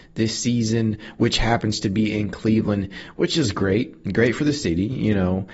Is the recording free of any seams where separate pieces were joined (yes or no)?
yes